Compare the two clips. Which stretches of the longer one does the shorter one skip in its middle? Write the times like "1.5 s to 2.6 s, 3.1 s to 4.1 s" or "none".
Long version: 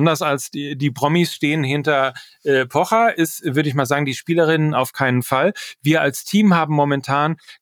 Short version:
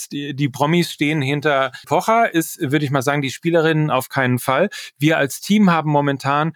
2.3 s to 2.7 s

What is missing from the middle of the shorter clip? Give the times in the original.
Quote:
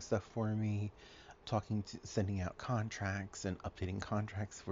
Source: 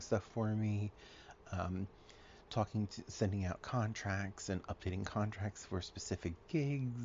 1.4 s to 2.4 s

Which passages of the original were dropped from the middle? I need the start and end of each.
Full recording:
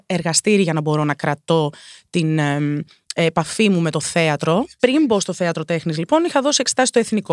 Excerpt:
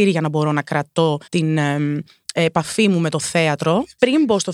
1.8 s to 2.1 s

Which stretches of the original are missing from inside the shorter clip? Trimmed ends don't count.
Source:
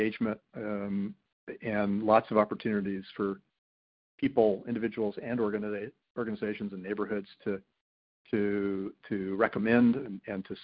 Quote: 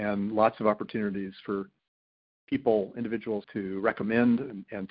5.1 s to 9.0 s

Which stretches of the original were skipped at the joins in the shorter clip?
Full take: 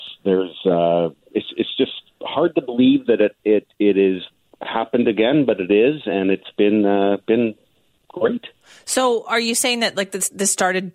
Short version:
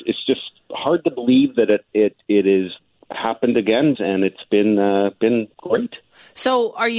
5.5 s to 6.0 s, 7.6 s to 8.0 s

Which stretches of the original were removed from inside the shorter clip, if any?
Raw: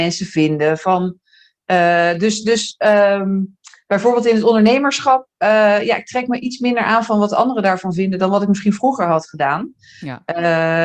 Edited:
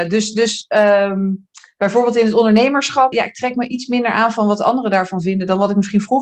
5.2 s to 5.8 s

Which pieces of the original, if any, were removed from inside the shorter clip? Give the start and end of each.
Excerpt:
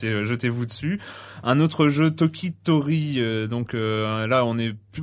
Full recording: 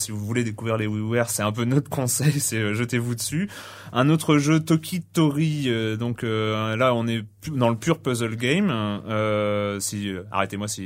none

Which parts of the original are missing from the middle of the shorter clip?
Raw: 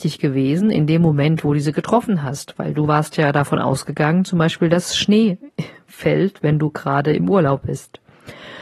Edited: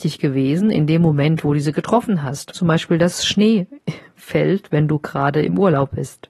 2.5 s to 4.3 s

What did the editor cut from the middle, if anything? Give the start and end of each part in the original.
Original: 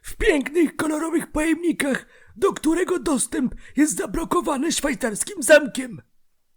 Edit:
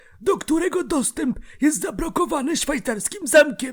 none

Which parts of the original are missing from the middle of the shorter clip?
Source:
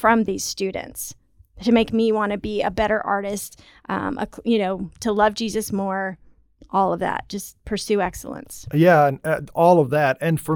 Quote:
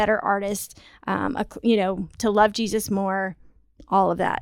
none

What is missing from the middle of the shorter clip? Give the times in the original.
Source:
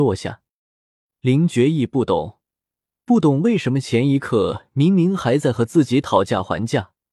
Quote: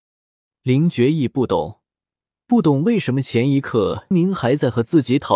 4.7 s to 4.9 s

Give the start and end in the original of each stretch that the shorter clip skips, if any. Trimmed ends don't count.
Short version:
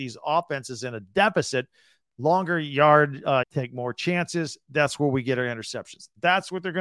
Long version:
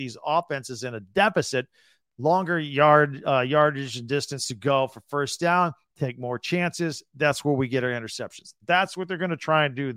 3.4 s to 5.9 s

